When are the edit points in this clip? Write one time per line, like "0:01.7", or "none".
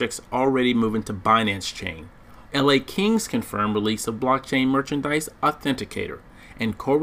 0:02.5